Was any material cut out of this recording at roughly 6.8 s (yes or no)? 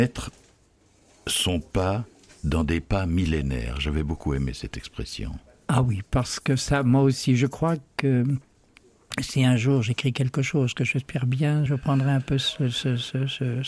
no